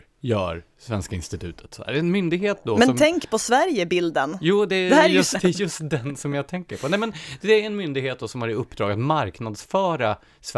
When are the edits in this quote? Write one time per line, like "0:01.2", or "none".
0:05.3